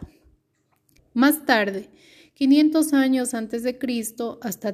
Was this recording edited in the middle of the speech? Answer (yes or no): yes